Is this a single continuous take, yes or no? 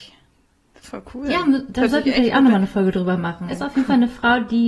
no